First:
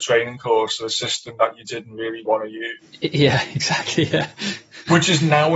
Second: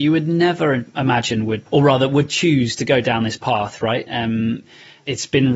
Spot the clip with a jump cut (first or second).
second